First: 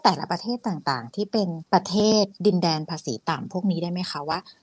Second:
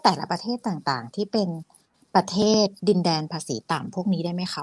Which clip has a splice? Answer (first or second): first